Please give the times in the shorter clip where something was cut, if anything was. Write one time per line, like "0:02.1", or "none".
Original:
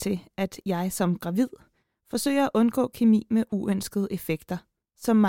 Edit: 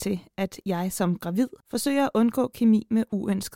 0:01.6